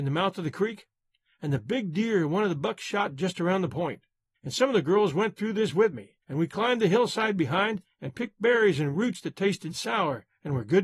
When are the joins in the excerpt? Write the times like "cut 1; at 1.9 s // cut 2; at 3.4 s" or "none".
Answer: cut 1; at 4.3 s // cut 2; at 6.2 s